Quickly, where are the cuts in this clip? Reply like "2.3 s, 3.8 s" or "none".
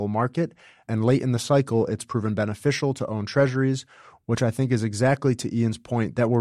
none